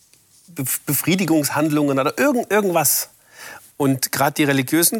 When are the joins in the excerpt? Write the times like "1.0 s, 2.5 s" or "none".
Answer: 3.7 s